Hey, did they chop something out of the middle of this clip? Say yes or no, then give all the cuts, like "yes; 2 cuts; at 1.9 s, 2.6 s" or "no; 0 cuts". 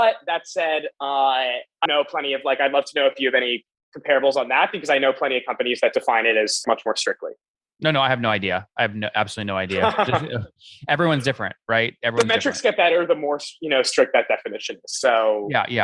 yes; 2 cuts; at 1.9 s, 6.6 s